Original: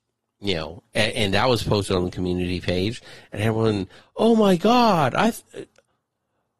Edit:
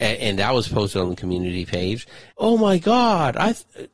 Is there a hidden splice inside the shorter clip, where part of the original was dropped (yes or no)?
yes